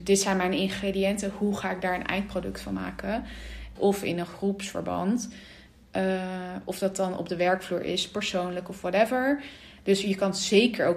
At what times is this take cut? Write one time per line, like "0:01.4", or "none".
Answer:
0:03.8